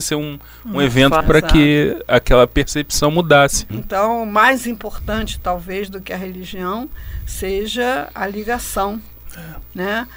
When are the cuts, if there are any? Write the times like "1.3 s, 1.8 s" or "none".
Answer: 1.2 s, 3.7 s